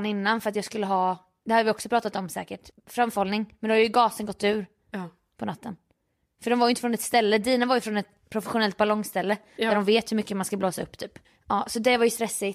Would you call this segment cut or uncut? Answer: cut